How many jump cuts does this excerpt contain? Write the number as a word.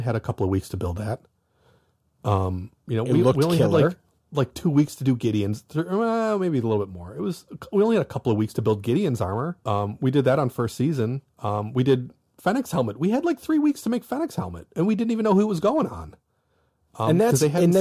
two